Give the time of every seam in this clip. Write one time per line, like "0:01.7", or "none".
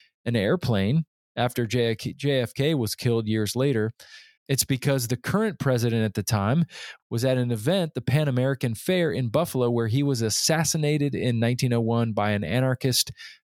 0:04.4
0:07.0